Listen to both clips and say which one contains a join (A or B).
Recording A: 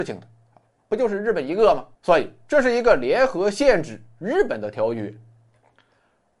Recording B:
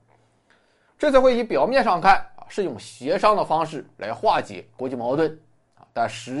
A